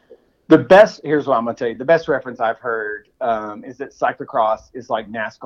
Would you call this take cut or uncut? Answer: uncut